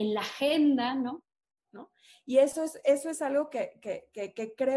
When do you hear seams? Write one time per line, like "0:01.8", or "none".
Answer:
0:01.6